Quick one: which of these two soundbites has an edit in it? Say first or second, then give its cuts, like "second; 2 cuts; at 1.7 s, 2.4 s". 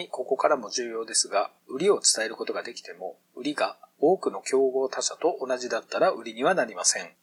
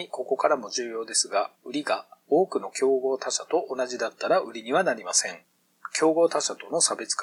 second; 1 cut; at 1.6 s